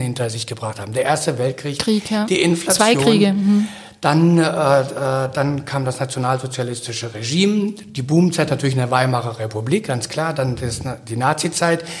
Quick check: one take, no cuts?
yes; 0 cuts

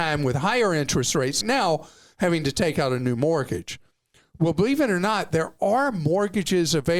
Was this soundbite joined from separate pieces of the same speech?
yes; 1 cut; at 1.4 s

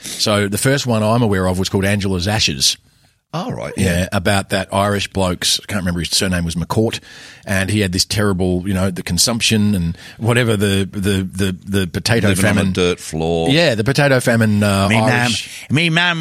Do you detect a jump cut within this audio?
no; 0 cuts

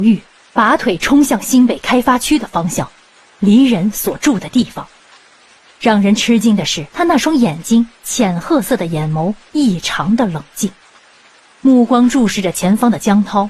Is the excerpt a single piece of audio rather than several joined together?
no; 2 cuts; at 5.7 s, 6.9 s

